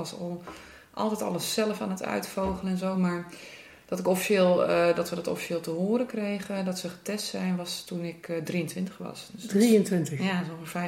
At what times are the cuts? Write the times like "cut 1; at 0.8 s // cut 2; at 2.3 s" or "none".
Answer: none